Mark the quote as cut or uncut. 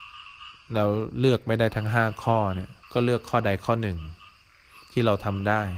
cut